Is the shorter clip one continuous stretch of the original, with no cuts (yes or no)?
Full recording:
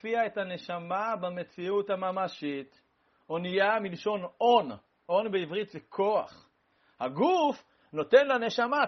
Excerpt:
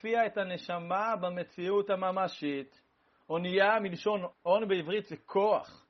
no